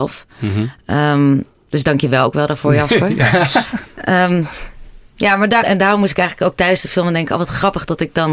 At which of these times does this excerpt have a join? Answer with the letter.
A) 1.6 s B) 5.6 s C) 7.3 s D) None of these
B